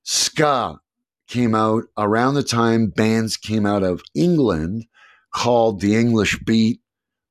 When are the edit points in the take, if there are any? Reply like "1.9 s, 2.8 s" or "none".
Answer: none